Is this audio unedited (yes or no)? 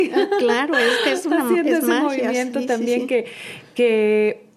yes